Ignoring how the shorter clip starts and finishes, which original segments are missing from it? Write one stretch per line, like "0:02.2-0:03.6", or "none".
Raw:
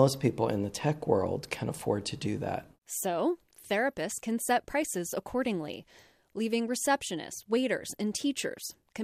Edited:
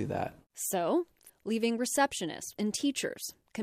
0:03.6-0:06.2
0:07.4-0:08.0